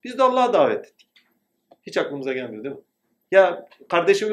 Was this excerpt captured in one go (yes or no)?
yes